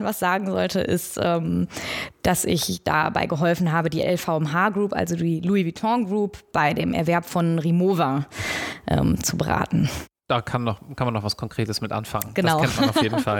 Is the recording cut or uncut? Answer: uncut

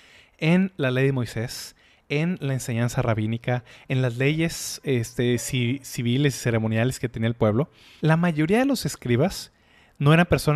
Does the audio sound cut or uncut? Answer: cut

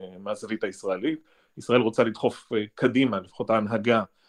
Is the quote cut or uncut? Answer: uncut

